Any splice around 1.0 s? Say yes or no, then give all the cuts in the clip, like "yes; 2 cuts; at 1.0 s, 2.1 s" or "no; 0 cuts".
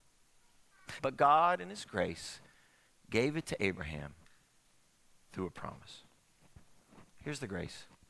yes; 1 cut; at 1.0 s